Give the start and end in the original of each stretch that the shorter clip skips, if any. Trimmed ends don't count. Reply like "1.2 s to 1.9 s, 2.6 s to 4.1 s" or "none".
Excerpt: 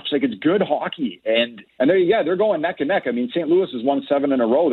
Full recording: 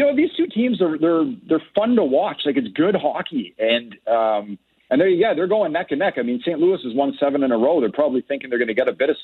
4.0 s to 4.8 s